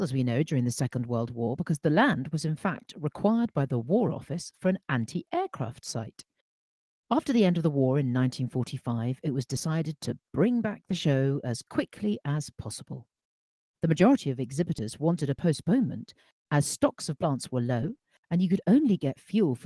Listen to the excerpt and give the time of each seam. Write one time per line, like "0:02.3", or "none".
0:18.2